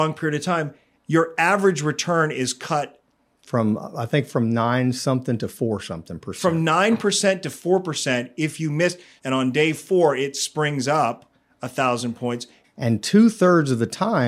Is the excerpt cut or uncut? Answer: cut